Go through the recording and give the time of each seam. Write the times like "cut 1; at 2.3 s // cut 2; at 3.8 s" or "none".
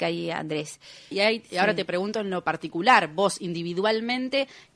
cut 1; at 1.1 s